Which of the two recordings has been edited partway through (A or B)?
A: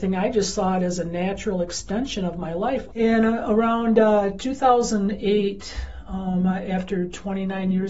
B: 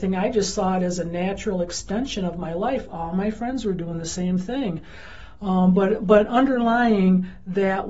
A